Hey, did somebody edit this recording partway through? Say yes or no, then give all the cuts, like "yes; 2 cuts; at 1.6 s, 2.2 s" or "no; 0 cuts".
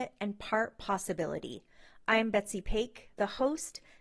no; 0 cuts